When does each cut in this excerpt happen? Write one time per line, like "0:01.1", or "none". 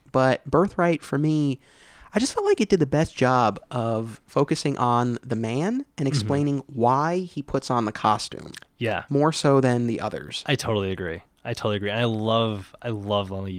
none